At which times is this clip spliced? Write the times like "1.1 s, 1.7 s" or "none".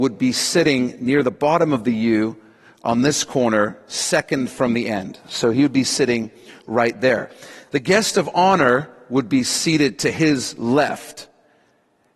none